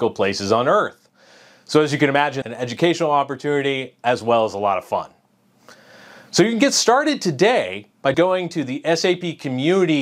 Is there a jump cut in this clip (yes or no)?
yes